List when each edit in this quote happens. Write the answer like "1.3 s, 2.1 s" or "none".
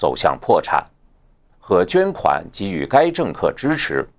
1.5 s